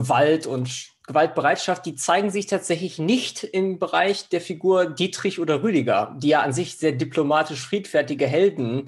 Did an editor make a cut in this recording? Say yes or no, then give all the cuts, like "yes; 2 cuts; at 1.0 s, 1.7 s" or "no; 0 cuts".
no; 0 cuts